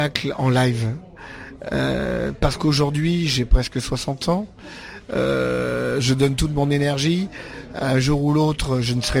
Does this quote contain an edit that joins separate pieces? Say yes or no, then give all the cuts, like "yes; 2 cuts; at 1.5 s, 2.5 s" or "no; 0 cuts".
no; 0 cuts